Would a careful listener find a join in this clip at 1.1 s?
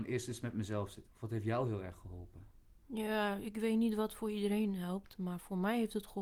yes; 1 cut; at 1.1 s

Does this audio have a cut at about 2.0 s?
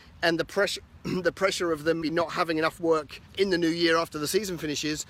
yes; 2 cuts; at 2.0 s, 3.3 s

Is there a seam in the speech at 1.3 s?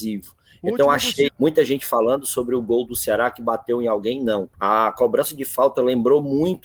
yes; 2 cuts; at 1.3 s, 4.5 s

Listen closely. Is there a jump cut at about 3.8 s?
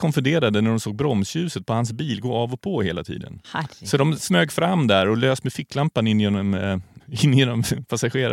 no; 1 cut; at 7.0 s

